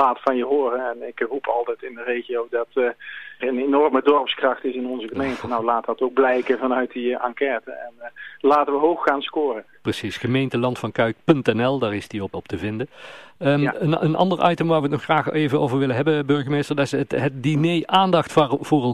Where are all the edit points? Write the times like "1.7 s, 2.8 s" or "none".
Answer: 3.4 s, 12.3 s